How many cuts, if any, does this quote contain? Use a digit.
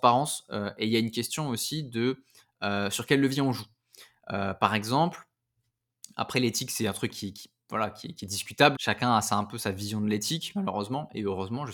1